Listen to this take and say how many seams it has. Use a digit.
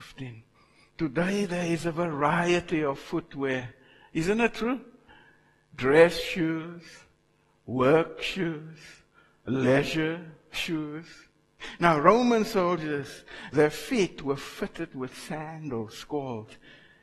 2